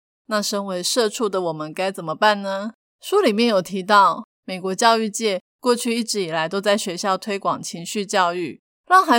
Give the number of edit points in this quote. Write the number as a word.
zero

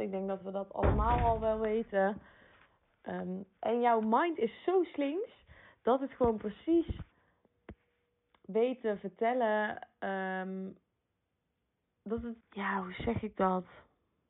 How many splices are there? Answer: one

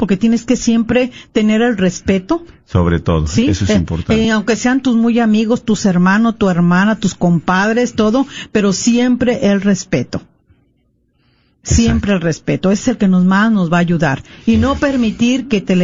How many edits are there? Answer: zero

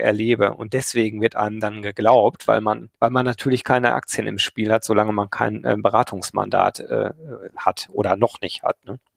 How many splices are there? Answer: one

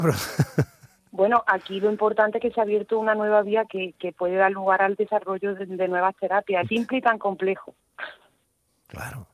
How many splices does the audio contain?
three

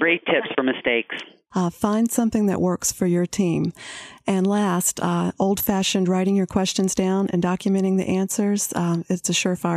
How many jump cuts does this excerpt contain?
one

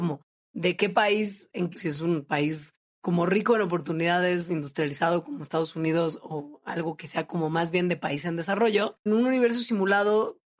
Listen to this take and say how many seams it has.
two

